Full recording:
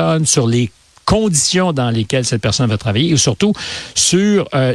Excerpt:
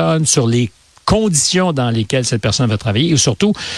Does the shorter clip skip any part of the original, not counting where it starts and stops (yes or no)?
no